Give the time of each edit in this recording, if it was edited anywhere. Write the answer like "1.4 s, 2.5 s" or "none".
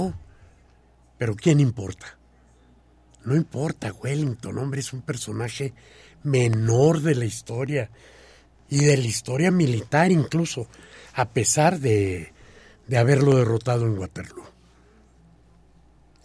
none